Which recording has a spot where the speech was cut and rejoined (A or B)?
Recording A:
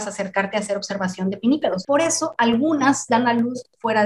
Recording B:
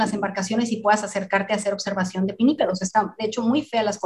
A